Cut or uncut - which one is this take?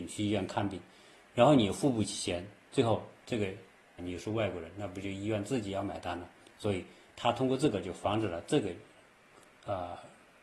cut